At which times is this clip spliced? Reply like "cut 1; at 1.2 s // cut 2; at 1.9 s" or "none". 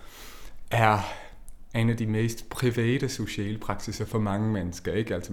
none